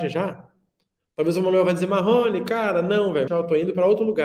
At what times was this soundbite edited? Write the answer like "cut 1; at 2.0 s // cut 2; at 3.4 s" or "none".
cut 1; at 3.3 s